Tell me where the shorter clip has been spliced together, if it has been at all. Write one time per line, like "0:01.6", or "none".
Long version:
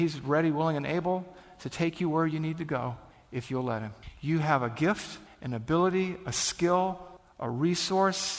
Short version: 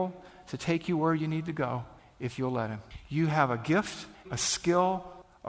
0:04.2